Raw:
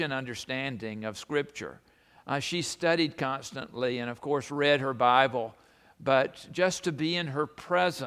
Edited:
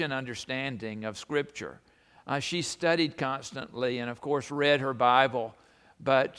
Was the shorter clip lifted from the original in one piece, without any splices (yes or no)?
yes